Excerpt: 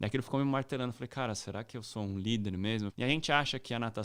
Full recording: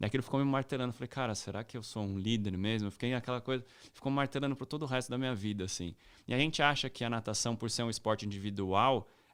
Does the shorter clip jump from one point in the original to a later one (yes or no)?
yes